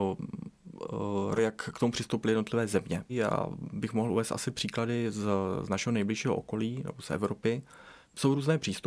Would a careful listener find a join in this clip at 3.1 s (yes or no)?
yes